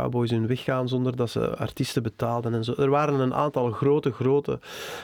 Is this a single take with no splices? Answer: yes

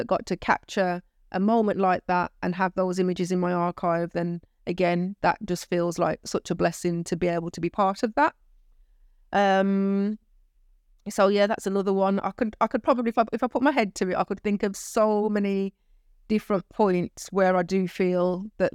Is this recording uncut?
yes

